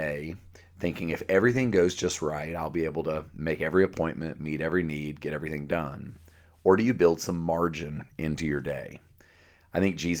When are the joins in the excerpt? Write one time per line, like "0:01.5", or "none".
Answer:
none